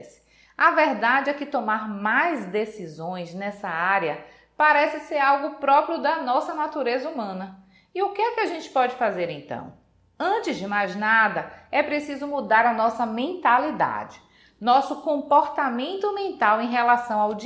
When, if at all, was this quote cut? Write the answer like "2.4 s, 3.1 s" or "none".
none